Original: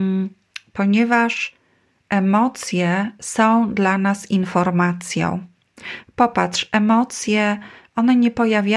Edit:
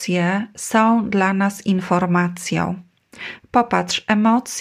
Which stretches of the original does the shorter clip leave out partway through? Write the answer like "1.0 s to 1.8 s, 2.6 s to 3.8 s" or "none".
none